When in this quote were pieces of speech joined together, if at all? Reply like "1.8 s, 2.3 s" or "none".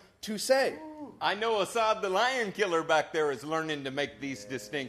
none